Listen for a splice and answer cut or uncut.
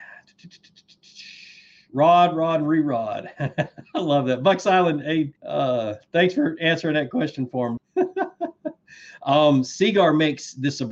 cut